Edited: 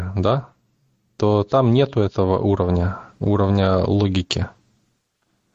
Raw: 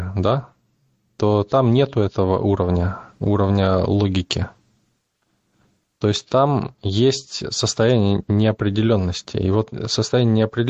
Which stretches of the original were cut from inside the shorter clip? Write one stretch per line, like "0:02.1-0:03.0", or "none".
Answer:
none